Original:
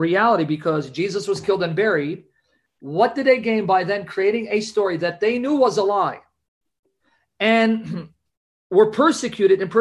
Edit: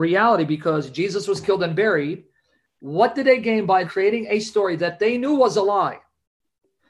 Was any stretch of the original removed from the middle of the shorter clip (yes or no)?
yes